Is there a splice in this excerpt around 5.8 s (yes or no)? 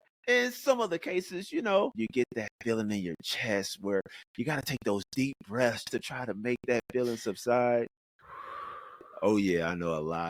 yes